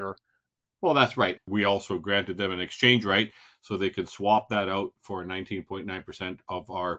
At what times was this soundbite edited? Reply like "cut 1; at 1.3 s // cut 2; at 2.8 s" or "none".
cut 1; at 1.4 s